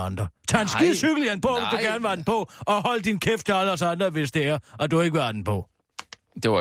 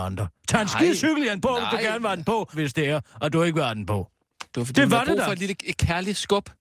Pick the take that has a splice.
second; 2 cuts; at 2.5 s, 4.5 s

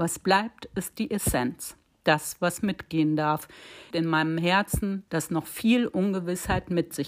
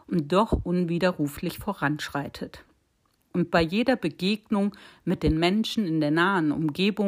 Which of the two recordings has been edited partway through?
first; 2 cuts; at 3.9 s, 5.1 s

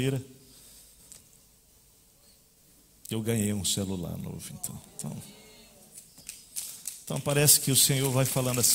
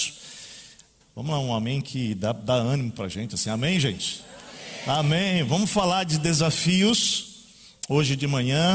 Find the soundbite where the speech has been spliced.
second; 1 cut; at 1.0 s

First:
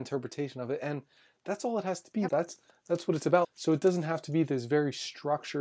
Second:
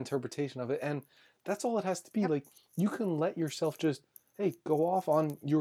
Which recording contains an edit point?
first; 2 cuts; at 2.3 s, 3.4 s

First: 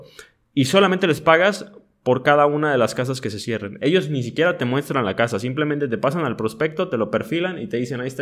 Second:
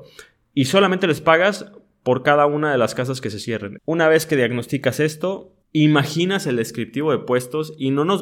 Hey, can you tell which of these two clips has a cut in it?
second; 2 cuts; at 3.8 s, 5.6 s

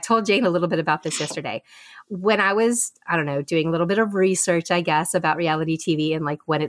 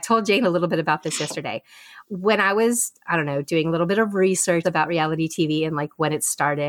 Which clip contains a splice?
second; 1 cut; at 4.6 s

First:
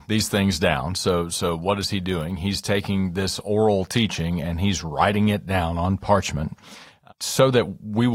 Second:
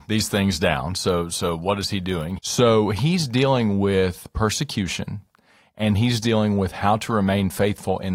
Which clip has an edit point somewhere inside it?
second; 1 cut; at 2.4 s

